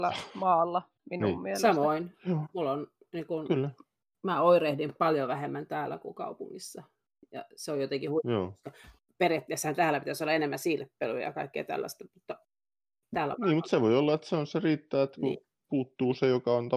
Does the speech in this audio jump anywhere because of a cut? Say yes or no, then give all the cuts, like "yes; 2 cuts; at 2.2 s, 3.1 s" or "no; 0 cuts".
no; 0 cuts